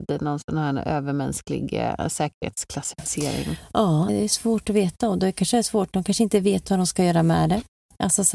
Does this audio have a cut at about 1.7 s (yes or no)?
no